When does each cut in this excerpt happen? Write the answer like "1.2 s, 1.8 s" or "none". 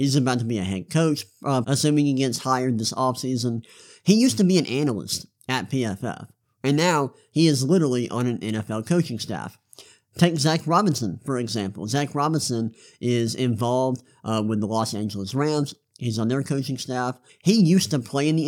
1.6 s, 17.3 s